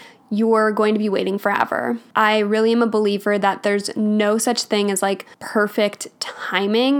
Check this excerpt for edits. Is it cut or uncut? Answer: cut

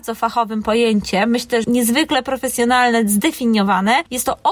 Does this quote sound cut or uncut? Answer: cut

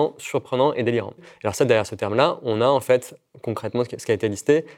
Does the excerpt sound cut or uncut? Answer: cut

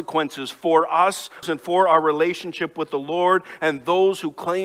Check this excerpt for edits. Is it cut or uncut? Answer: cut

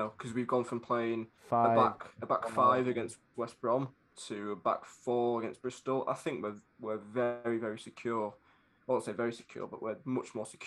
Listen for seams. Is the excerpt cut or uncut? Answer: cut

